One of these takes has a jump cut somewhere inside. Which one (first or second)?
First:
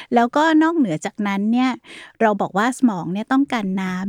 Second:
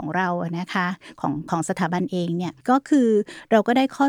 second